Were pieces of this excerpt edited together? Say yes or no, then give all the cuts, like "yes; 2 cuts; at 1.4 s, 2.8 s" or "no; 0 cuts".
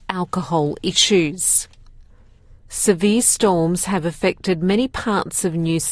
no; 0 cuts